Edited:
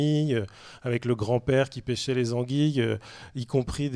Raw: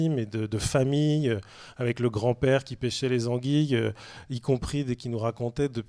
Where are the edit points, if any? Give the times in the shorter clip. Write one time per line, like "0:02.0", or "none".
none